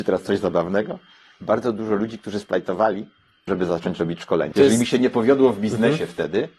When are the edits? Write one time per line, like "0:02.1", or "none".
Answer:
0:03.5
0:04.5